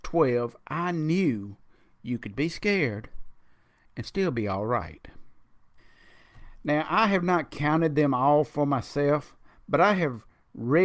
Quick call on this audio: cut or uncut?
uncut